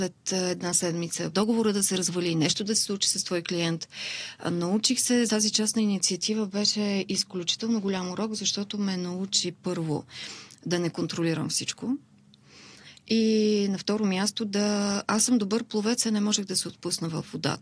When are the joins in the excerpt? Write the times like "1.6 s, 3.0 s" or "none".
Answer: 1.3 s, 5.3 s